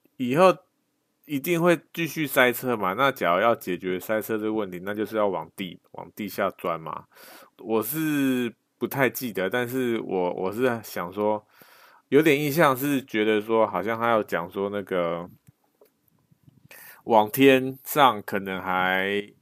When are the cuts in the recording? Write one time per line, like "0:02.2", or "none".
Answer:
0:07.5

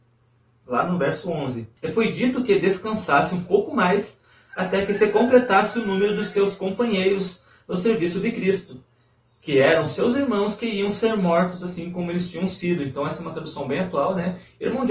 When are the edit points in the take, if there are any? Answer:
0:01.8

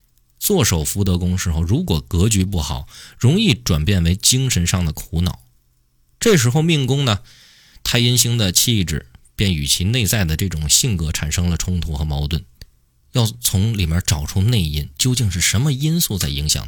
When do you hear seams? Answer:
0:13.0

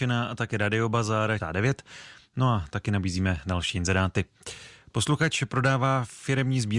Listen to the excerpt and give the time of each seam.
0:01.4

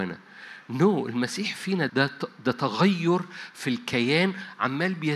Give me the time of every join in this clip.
0:01.9

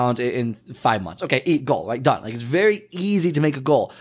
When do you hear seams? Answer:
none

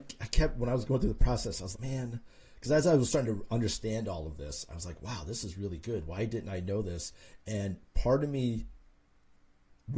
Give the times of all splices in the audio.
0:01.7

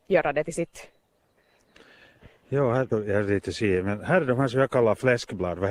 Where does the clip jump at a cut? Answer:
0:02.9

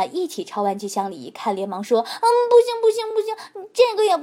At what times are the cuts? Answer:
none

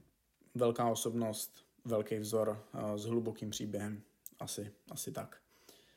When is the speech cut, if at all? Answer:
none

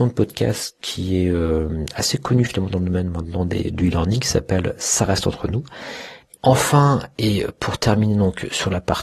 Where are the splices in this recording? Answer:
0:06.4

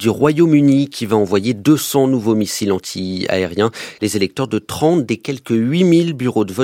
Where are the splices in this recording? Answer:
0:04.0

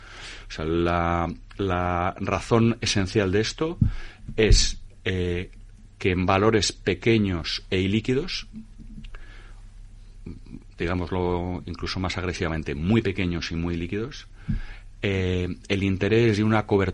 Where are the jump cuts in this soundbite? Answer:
none

